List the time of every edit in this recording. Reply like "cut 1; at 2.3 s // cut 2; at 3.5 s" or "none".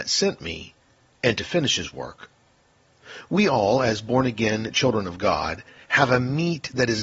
none